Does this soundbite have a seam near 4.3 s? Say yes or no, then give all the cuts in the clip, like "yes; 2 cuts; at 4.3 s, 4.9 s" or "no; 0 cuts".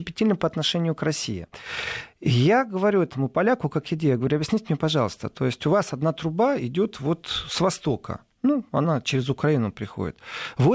no; 0 cuts